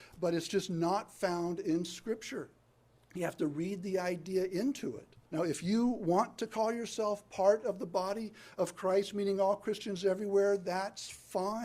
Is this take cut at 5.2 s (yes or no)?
yes